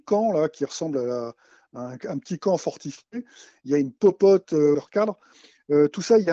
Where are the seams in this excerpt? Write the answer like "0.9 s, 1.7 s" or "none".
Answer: 3.6 s, 4.7 s